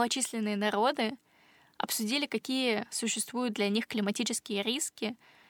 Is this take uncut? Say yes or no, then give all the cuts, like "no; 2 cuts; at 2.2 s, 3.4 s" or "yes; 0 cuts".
yes; 0 cuts